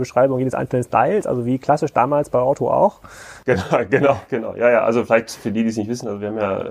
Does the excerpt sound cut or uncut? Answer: uncut